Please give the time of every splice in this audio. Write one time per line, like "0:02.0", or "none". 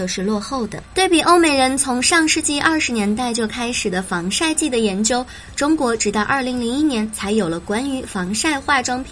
none

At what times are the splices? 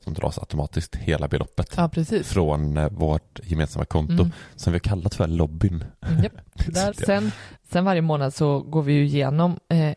0:06.9

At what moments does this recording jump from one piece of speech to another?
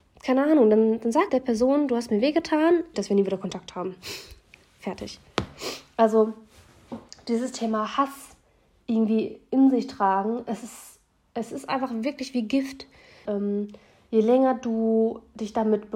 0:01.3
0:02.9
0:13.3

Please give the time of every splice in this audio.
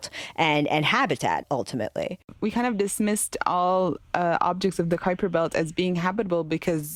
none

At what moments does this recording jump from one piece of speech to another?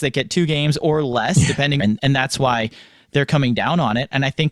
0:01.8

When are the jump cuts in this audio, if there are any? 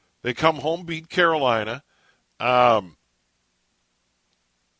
0:02.2

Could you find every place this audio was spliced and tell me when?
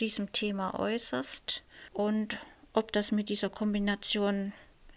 0:01.9

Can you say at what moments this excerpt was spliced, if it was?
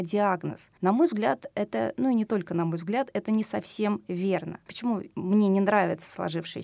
none

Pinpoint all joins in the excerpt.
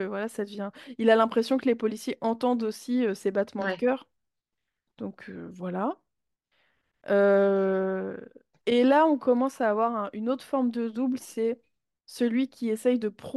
none

